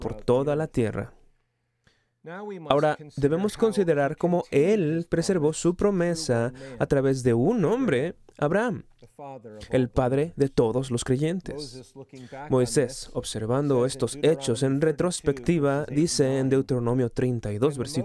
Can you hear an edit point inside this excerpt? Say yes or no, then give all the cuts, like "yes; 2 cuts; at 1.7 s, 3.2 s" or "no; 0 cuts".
no; 0 cuts